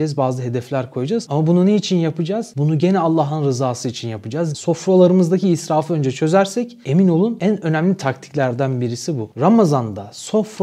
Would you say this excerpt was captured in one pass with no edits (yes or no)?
no